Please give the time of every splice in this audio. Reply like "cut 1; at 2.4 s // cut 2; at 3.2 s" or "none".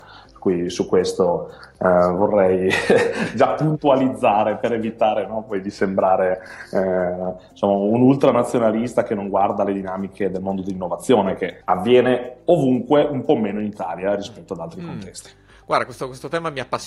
cut 1; at 11.6 s